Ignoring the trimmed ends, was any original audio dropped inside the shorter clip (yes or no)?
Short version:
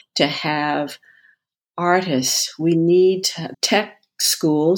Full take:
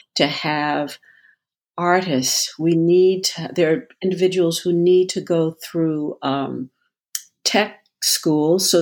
yes